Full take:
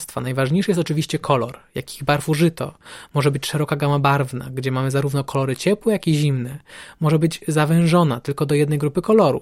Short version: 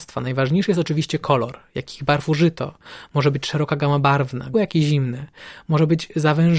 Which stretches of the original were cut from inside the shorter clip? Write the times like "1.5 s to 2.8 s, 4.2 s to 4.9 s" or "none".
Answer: 4.5 s to 5.9 s